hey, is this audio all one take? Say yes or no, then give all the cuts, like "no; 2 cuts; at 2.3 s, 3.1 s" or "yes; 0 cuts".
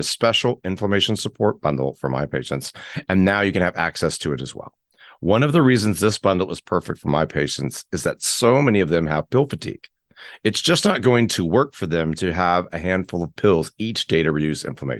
yes; 0 cuts